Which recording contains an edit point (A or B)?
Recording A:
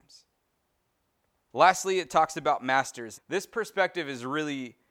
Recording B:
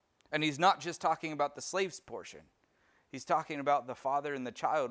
A